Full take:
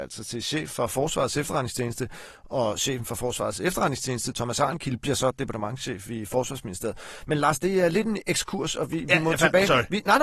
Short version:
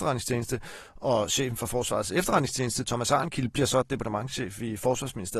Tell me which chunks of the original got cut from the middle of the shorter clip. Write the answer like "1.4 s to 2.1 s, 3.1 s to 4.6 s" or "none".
none